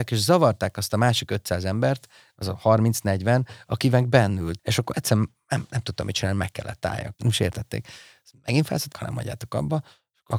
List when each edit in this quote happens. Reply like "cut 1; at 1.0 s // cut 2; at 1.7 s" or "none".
cut 1; at 4.6 s // cut 2; at 7.1 s // cut 3; at 8.9 s